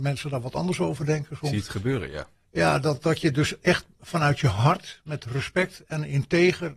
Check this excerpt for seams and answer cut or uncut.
uncut